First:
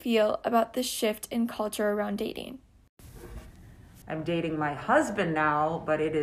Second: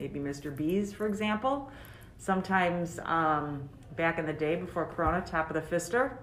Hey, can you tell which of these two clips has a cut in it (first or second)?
first